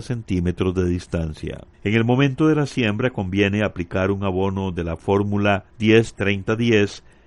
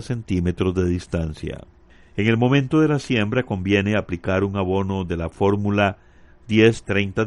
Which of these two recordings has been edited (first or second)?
first